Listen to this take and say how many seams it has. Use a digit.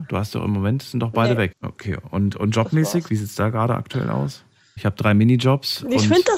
3